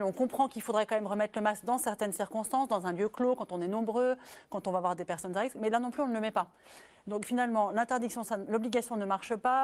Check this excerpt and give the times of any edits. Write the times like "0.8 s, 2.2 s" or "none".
none

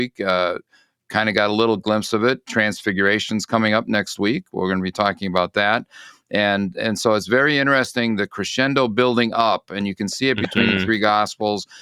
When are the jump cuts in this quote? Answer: 2.4 s

